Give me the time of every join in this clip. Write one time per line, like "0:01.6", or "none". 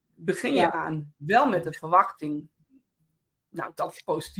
none